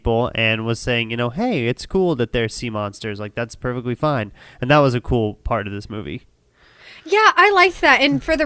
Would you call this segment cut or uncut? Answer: uncut